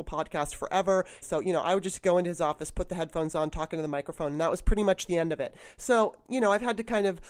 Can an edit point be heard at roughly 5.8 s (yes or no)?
no